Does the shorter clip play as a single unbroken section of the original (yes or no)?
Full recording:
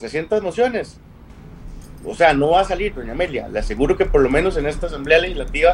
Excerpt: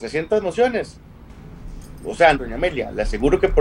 no